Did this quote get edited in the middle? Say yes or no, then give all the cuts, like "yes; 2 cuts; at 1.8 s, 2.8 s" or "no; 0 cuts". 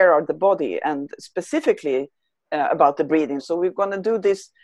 yes; 1 cut; at 3.4 s